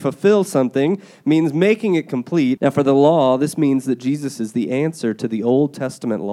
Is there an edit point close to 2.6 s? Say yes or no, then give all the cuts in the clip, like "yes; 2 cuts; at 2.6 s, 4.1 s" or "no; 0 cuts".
yes; 1 cut; at 2.6 s